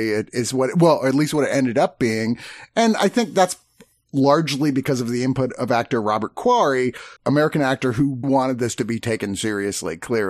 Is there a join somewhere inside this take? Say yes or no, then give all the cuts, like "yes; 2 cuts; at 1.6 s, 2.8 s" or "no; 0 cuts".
yes; 2 cuts; at 7.2 s, 8.2 s